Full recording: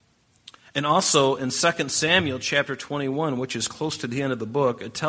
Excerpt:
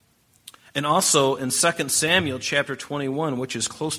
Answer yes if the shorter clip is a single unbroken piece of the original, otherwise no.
yes